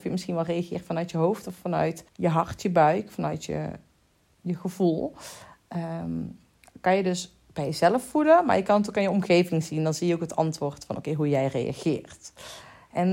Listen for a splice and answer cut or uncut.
cut